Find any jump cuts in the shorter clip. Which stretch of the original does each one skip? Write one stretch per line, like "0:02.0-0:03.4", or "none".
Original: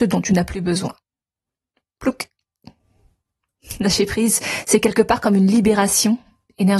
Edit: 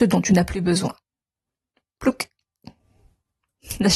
none